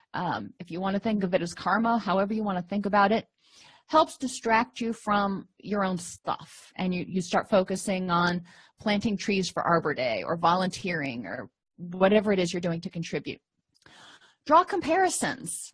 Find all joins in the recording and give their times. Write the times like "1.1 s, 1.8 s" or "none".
none